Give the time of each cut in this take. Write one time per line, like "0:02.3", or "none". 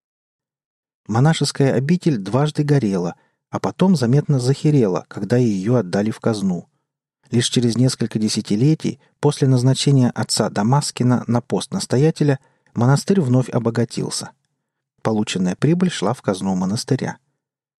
0:14.8